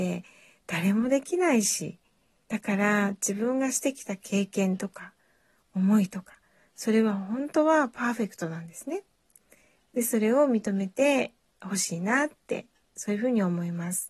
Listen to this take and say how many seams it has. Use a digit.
1